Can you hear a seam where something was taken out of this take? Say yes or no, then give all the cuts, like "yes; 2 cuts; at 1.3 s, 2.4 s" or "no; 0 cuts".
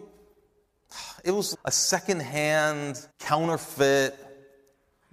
yes; 2 cuts; at 1.5 s, 3.1 s